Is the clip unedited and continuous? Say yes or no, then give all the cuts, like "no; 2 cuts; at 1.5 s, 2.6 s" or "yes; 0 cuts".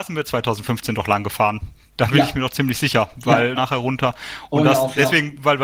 no; 1 cut; at 3.6 s